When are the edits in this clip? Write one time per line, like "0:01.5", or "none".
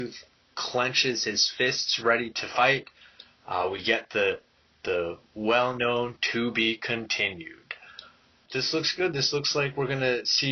0:08.5